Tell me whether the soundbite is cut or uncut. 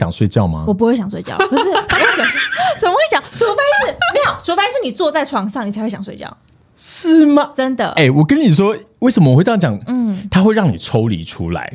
cut